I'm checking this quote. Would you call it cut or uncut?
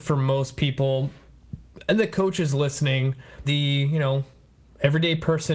cut